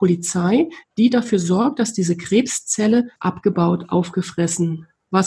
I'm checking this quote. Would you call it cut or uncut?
cut